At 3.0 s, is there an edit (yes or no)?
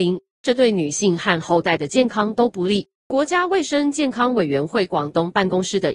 yes